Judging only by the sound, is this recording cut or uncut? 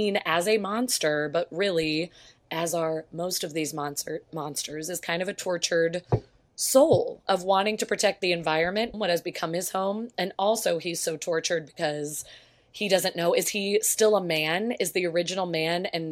cut